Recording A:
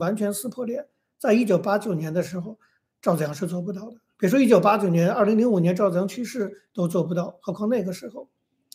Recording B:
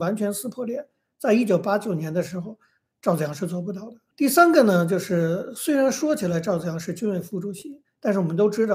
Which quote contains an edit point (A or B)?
B